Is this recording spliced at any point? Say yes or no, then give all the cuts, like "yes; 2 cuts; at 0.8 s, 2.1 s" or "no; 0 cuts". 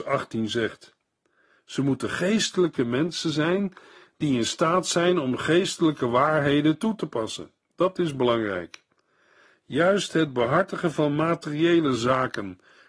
no; 0 cuts